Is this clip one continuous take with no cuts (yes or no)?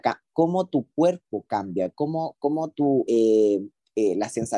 yes